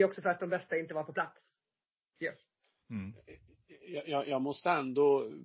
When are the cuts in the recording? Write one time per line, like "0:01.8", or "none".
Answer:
none